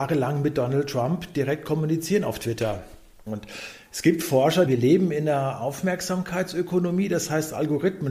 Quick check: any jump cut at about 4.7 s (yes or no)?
yes